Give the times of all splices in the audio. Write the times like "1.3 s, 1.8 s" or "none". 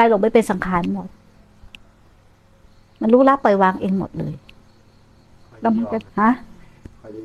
6.1 s